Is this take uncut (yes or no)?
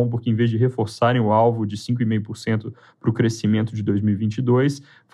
yes